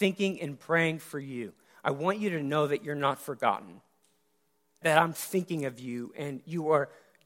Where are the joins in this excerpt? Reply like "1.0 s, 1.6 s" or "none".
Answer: 4.8 s

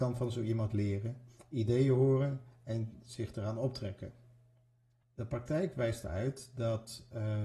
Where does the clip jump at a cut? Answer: 5.0 s

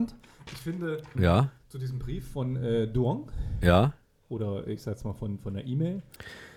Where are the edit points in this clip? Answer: 1.1 s

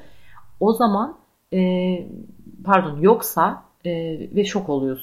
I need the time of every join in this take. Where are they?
3.8 s

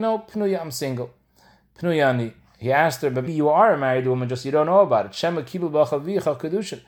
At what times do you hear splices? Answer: 3.3 s

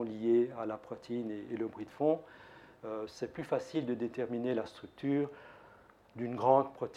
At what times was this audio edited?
none

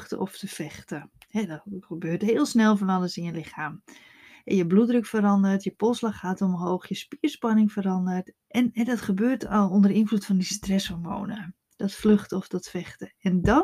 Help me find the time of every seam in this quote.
8.3 s, 11.7 s

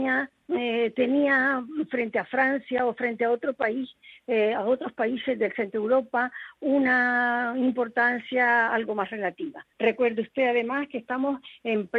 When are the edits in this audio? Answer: 9.7 s

